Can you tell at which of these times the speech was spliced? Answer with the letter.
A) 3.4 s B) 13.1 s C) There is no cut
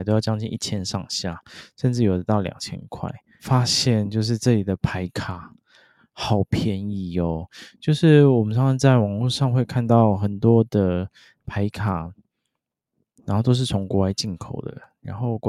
A